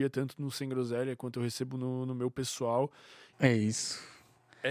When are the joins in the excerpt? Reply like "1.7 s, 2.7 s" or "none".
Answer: 3.3 s

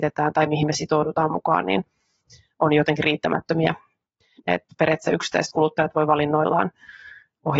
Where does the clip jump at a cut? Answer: 4.4 s

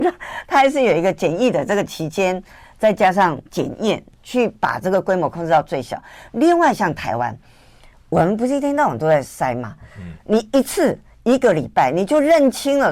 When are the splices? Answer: 10.2 s

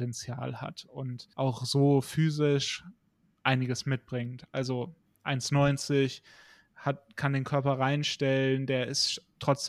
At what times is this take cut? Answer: 1.3 s

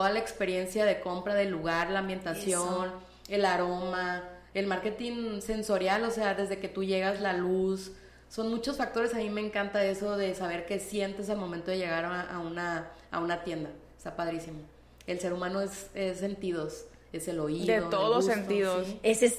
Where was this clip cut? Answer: none

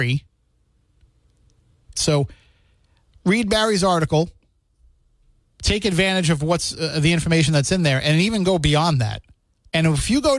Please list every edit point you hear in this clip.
2.0 s

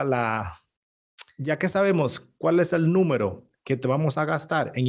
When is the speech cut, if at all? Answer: none

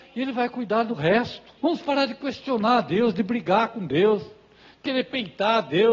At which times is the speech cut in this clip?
1.6 s

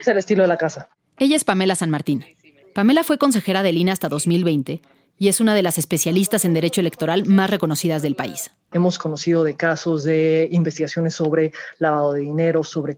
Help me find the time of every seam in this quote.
2.6 s, 8.7 s

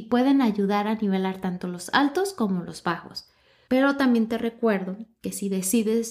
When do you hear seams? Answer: 3.7 s

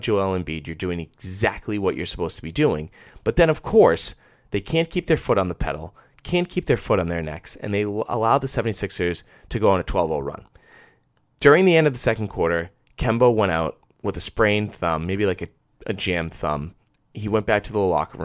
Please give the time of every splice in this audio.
none

